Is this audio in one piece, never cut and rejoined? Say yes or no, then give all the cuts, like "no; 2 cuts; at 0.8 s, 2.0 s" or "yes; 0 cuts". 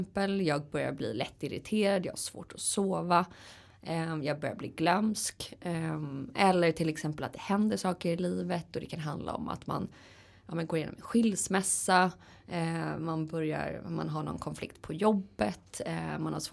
yes; 0 cuts